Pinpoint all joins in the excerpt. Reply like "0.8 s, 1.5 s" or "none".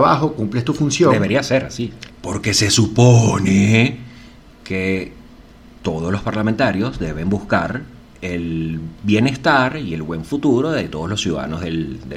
2.1 s